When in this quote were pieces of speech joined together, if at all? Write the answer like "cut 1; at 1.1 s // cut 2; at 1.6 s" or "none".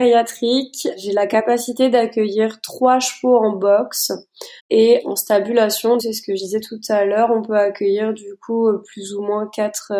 cut 1; at 4.6 s // cut 2; at 6.0 s